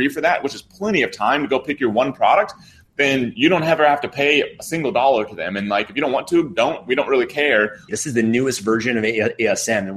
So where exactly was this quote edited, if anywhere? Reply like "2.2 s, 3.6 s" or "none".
7.9 s

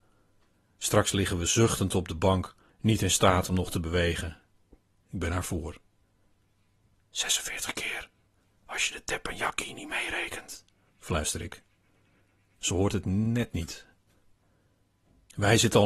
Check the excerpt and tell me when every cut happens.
2.7 s, 5.0 s

